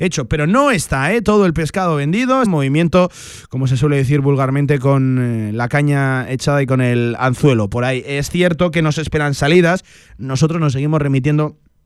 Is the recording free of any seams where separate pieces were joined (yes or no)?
no